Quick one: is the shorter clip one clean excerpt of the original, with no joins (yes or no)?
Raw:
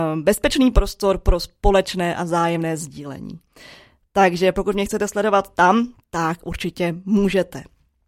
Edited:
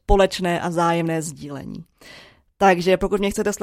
yes